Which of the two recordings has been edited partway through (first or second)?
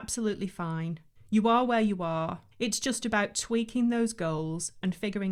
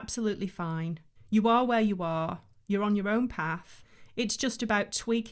first